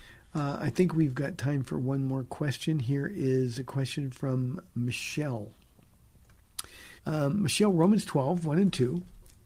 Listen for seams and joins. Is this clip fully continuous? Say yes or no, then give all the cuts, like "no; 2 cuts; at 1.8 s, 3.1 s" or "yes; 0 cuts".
no; 1 cut; at 7.0 s